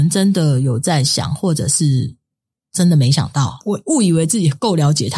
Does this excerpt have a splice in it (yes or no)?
yes